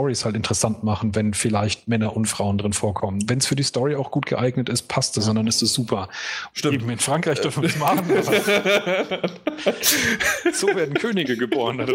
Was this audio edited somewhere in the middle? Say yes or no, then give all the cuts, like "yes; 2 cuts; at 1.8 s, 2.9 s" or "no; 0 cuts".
yes; 1 cut; at 6.5 s